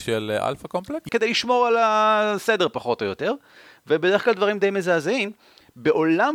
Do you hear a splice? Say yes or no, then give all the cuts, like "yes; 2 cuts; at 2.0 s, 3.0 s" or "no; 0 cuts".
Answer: yes; 1 cut; at 1.1 s